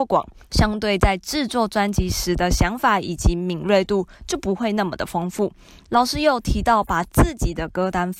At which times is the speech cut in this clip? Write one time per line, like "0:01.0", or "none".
none